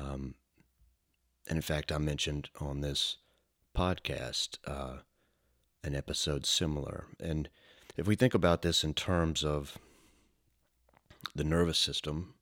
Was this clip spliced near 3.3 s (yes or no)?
no